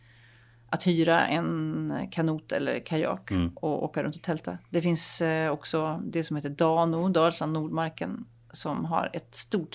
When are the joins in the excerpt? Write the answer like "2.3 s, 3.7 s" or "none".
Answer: none